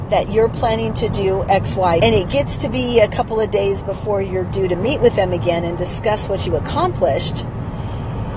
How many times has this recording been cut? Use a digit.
1